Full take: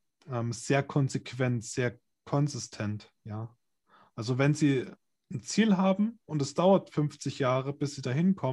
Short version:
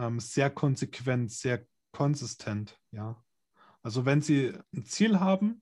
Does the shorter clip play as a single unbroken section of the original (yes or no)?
no